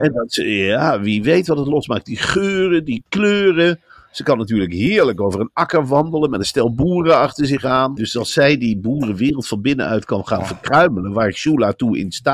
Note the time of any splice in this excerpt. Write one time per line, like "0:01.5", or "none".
0:08.0